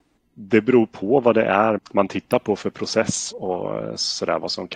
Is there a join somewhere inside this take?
yes; 2 cuts; at 1.8 s, 3.3 s

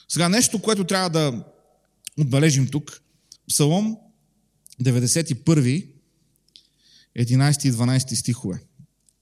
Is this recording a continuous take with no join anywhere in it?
no; 1 cut; at 3.4 s

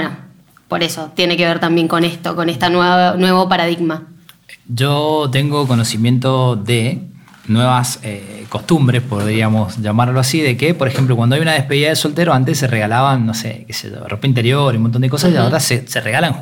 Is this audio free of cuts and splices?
yes; 0 cuts

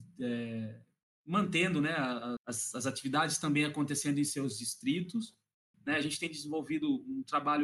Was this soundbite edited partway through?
yes; 2 cuts; at 2.4 s, 5.7 s

